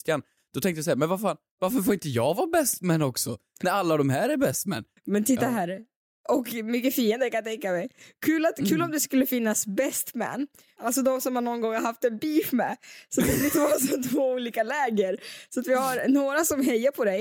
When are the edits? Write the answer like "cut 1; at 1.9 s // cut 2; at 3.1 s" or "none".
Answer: cut 1; at 5.0 s // cut 2; at 10.8 s